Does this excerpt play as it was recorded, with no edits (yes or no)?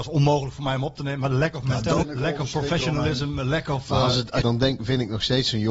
no